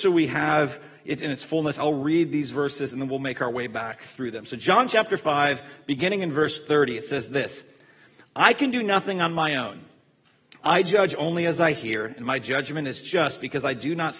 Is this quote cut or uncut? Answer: uncut